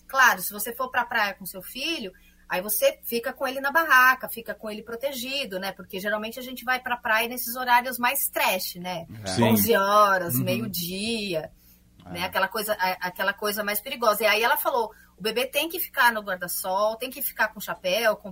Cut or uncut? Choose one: uncut